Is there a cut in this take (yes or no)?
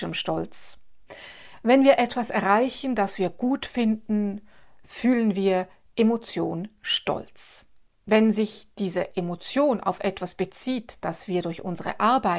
no